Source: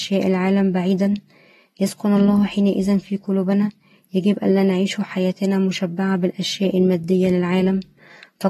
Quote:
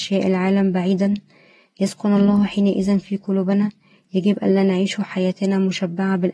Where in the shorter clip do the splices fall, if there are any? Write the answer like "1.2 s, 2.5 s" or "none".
none